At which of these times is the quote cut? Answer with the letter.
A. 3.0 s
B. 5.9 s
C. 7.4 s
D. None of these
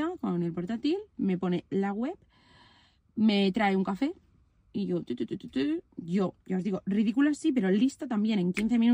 D